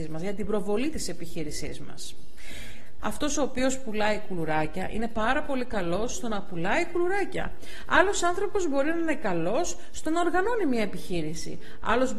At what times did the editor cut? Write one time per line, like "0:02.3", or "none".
0:03.0